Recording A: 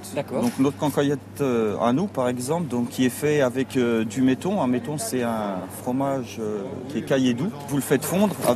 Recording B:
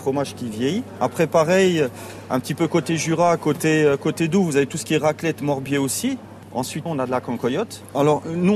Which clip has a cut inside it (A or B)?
B